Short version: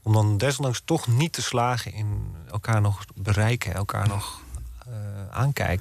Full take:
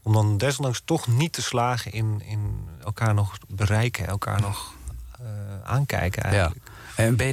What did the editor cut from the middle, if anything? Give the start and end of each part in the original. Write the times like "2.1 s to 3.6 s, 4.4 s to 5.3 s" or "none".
1.9 s to 2.2 s